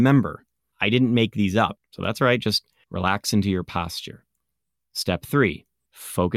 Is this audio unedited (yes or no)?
no